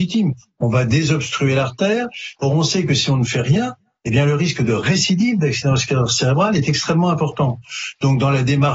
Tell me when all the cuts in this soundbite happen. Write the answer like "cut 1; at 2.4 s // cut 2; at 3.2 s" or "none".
cut 1; at 2.4 s